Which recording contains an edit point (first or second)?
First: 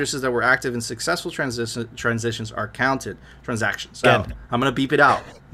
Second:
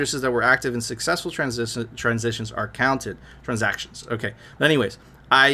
first